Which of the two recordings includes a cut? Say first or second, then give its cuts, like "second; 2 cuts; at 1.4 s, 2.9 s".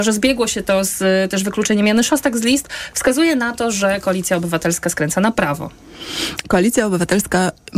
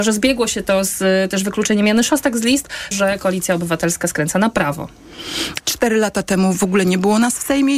second; 2 cuts; at 2.9 s, 5.6 s